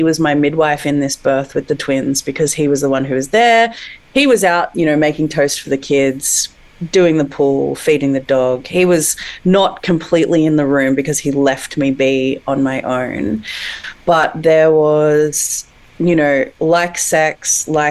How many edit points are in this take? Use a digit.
1